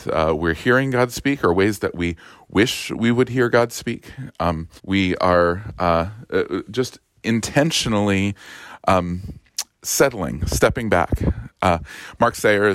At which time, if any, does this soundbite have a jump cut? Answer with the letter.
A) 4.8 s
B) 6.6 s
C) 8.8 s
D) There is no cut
A